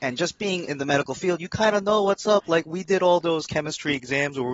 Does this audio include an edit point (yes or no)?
no